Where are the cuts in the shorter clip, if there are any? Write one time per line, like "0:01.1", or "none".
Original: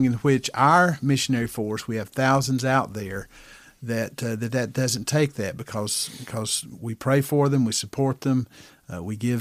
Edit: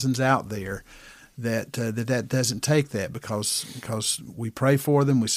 none